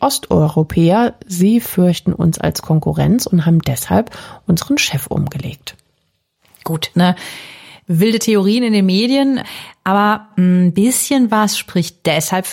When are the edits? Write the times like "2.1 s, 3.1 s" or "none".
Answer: 6.9 s